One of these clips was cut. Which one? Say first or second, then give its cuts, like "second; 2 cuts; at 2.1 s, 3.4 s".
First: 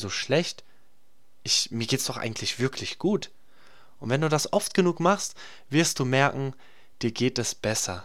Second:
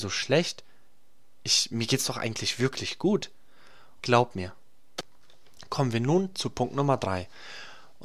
second; 1 cut; at 4.0 s